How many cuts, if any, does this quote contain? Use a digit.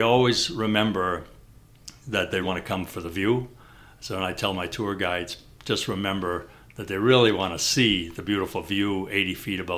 1